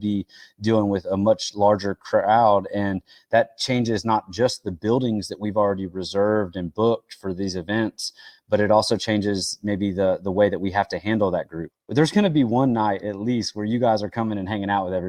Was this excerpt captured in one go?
no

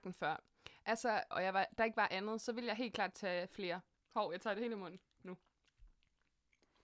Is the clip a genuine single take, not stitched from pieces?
no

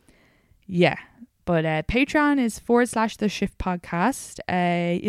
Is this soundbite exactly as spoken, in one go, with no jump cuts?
yes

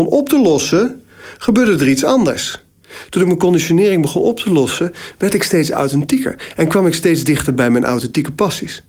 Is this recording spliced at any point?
no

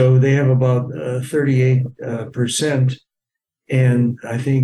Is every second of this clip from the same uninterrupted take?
yes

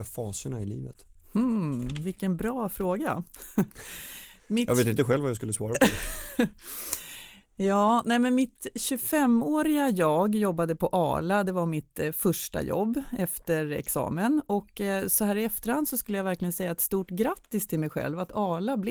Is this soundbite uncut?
yes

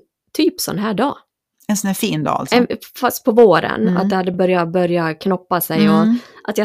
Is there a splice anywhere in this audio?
no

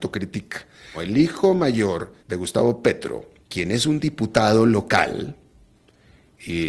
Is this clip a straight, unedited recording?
no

